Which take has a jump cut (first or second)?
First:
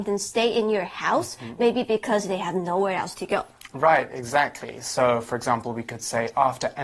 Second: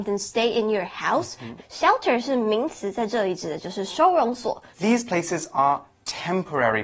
second